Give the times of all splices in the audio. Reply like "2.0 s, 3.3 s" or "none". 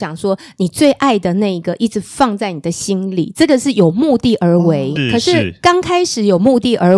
5.0 s